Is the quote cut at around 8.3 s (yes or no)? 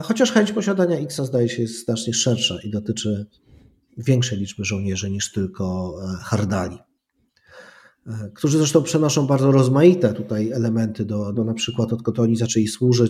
no